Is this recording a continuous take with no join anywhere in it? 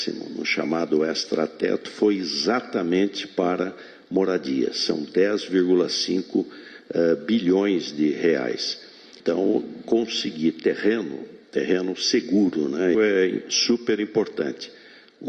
no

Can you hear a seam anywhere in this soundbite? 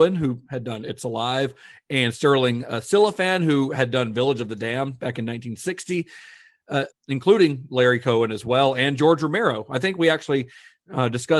yes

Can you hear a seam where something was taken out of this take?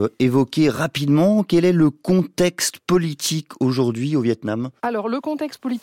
yes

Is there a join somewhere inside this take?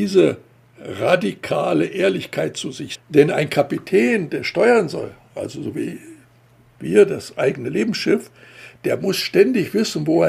yes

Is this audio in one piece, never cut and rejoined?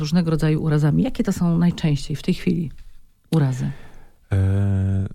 yes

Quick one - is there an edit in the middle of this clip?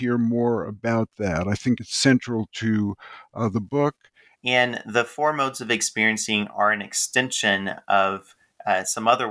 yes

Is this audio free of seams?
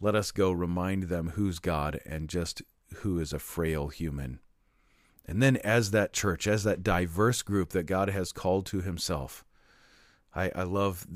yes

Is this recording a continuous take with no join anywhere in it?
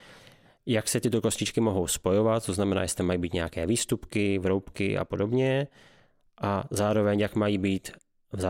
yes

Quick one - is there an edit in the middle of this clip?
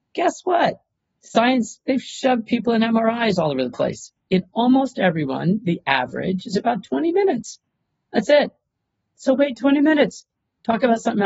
no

